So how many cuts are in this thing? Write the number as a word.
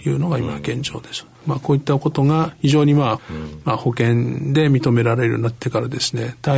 two